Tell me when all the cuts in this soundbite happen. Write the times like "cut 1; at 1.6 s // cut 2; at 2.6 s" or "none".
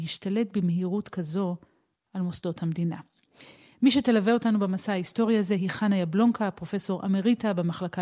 none